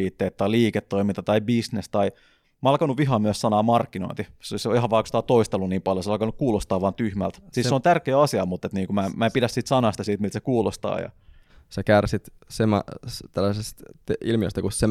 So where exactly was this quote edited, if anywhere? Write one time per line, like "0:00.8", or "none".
none